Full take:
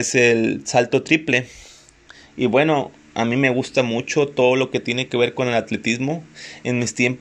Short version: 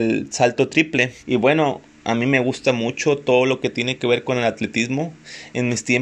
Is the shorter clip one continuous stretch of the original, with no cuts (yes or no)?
no